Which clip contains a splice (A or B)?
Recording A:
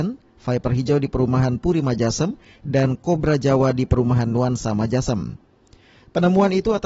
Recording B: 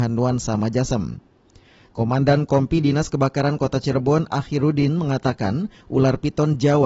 B